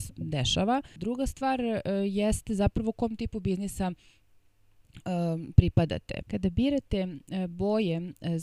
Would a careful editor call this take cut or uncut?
cut